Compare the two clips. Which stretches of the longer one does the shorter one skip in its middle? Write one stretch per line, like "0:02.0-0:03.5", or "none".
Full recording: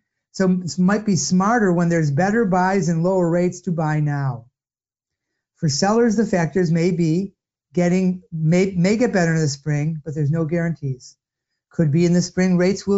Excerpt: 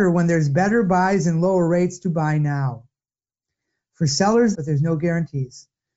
0:06.2-0:10.0